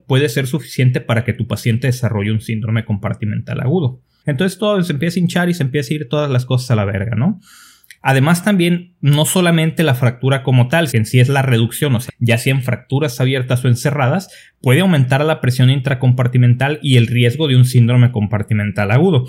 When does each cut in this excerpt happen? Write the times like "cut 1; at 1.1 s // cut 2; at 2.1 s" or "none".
cut 1; at 4.2 s // cut 2; at 10.9 s // cut 3; at 12.1 s